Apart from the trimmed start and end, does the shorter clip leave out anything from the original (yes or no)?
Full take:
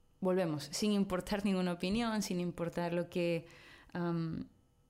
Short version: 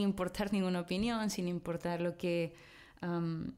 no